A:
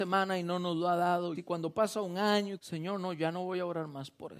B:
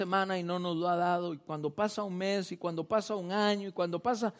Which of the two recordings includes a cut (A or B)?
A